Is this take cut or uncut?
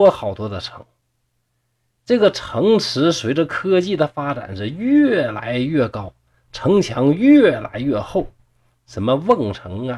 uncut